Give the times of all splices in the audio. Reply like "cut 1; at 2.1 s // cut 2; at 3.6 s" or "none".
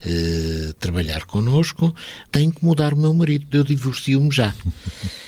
cut 1; at 2.3 s // cut 2; at 3.5 s